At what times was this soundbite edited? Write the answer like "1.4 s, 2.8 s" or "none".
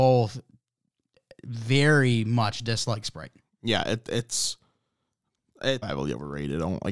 5.8 s